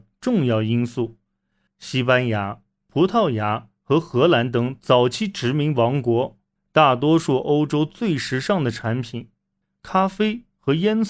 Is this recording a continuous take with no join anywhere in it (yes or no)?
no